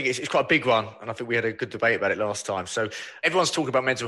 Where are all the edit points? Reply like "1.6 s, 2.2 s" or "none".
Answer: none